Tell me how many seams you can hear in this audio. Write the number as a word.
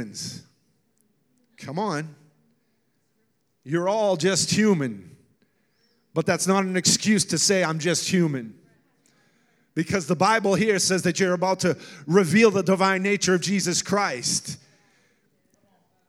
zero